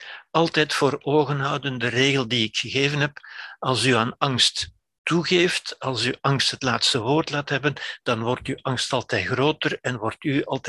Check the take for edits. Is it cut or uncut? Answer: uncut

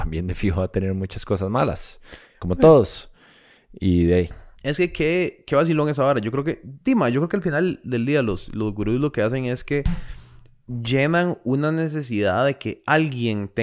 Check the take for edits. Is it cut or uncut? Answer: uncut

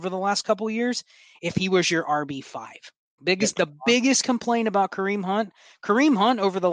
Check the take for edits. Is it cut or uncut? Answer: cut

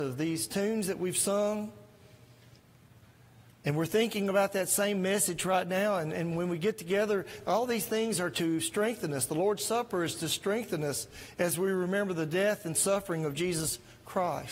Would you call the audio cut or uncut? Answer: uncut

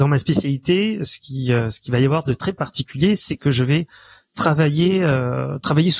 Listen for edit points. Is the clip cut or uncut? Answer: uncut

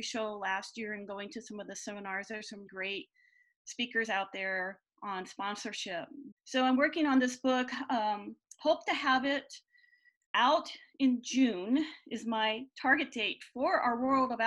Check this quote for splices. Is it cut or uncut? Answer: cut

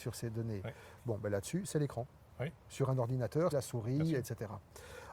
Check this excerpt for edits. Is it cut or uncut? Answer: cut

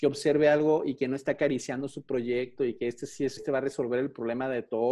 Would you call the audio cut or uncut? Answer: cut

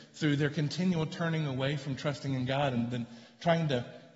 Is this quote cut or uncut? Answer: uncut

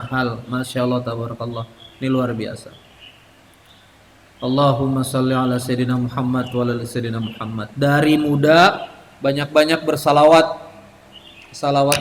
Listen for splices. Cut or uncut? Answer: uncut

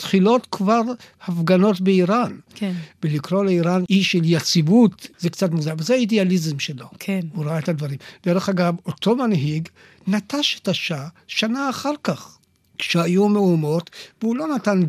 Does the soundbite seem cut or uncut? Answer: uncut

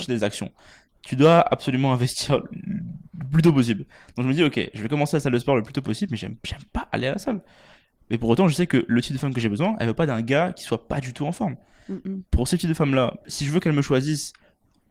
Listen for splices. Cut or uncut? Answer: uncut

